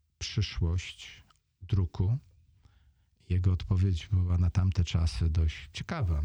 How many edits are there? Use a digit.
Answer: 0